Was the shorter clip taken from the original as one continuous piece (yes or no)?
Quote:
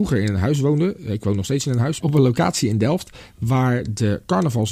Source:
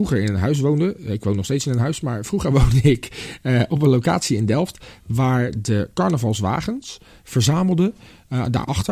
no